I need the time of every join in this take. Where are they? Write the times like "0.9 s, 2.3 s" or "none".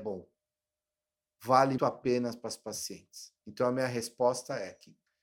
1.8 s, 3.4 s

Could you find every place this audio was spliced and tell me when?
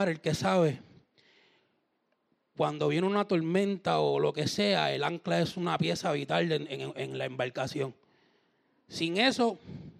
none

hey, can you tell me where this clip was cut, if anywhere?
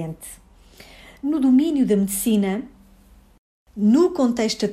none

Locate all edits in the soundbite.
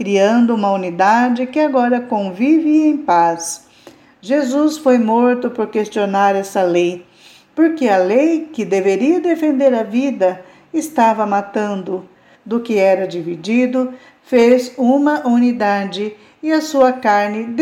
12.3 s

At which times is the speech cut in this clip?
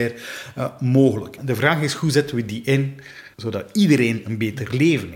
1.4 s, 3.3 s

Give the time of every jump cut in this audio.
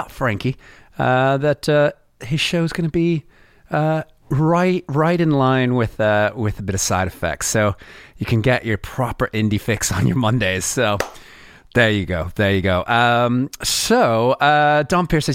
none

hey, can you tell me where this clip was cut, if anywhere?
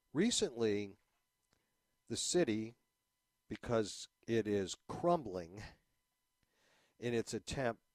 none

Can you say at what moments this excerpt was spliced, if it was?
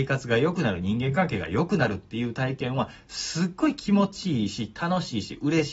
none

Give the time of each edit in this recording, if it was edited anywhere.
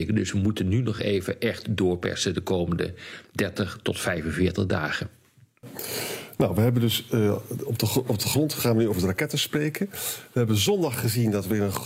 none

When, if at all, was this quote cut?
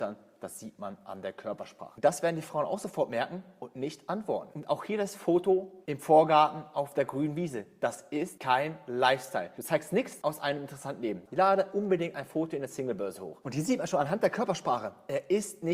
11.3 s, 13.4 s

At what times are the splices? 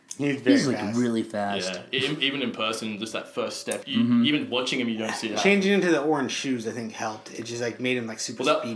3.8 s

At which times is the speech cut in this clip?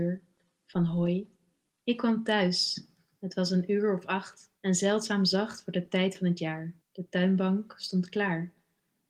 1.7 s, 4.6 s, 6.8 s

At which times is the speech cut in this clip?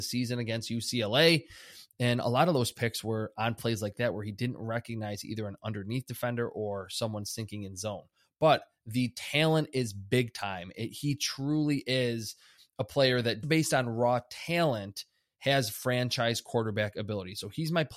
13.4 s

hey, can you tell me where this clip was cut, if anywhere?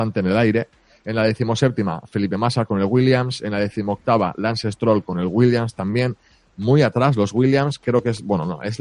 none

